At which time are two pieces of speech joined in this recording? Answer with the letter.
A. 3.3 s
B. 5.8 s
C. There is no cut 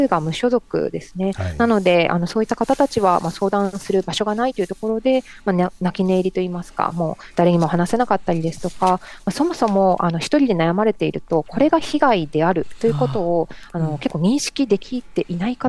C